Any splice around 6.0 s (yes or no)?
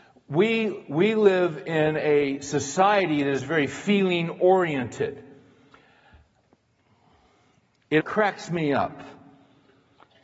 no